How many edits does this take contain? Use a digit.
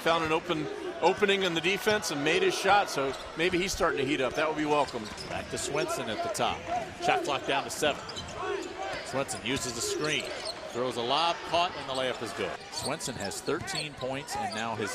0